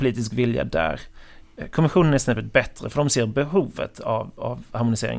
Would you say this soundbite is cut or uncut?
uncut